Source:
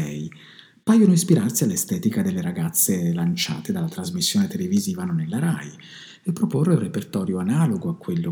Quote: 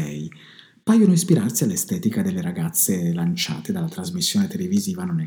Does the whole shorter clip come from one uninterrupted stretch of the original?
yes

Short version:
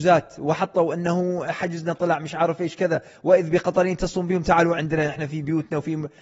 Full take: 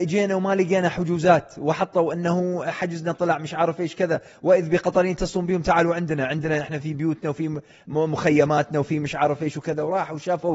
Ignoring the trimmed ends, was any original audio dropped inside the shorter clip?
yes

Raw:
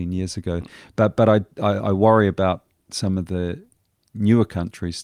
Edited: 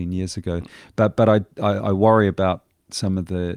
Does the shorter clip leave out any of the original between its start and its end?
no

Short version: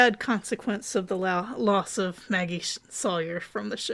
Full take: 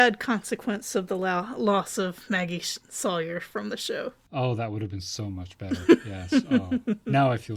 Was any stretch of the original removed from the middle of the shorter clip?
no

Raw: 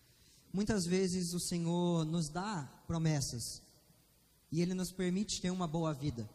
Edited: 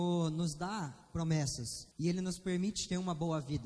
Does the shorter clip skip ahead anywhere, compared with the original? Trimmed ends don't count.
yes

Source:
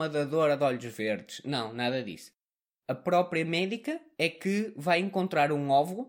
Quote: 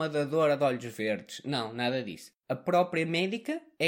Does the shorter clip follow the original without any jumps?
no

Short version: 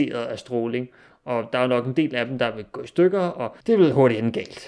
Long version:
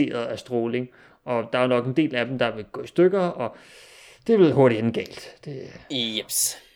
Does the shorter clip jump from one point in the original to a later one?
yes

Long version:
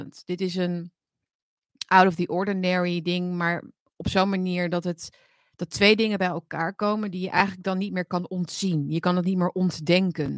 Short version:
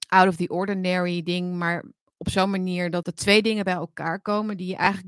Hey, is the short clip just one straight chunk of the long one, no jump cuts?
no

